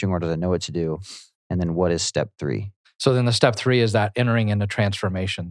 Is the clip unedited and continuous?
yes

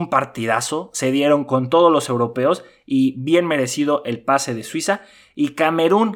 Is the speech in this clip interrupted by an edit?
no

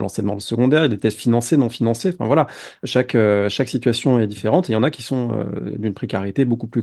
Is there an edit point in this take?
no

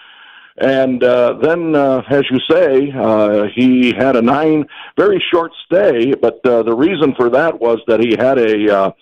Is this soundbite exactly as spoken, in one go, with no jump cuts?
yes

